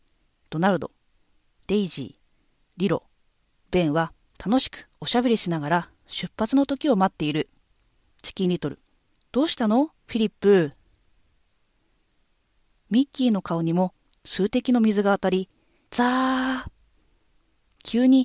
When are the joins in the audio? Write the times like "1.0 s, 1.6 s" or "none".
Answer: 8.1 s, 15.8 s